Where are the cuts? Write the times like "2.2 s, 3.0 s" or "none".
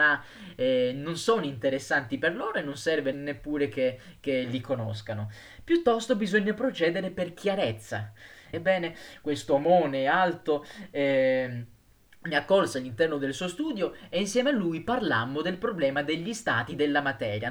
3.1 s, 8.5 s